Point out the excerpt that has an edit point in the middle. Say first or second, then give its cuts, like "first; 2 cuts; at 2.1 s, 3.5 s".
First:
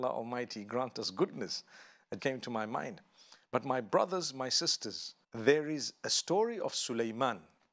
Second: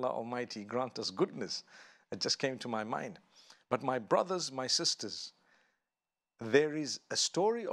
first; 2 cuts; at 2.2 s, 5.2 s